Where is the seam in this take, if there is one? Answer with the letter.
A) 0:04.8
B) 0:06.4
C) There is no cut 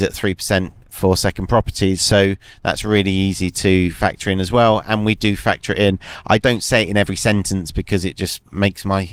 B